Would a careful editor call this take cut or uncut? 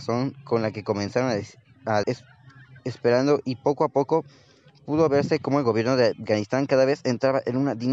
cut